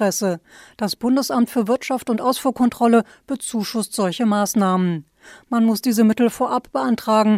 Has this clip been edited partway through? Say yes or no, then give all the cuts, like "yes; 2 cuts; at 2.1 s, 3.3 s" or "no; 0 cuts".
no; 0 cuts